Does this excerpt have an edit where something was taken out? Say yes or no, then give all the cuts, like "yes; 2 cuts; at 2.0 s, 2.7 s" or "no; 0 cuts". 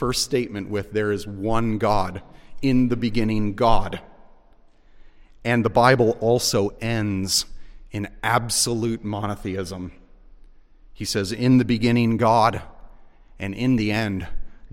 no; 0 cuts